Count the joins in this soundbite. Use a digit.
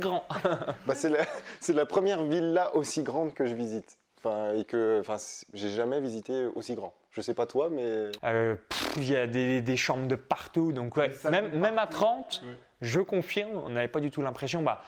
1